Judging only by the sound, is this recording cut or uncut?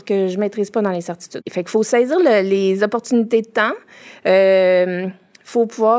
uncut